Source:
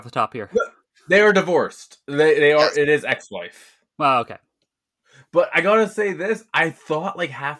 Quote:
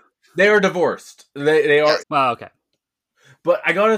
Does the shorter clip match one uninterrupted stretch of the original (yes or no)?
no